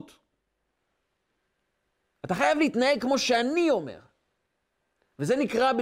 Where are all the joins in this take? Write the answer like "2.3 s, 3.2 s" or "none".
none